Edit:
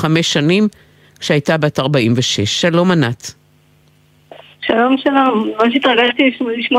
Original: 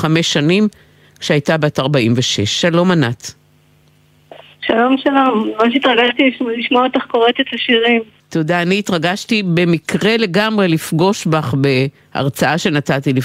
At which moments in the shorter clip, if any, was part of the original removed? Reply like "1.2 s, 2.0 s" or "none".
none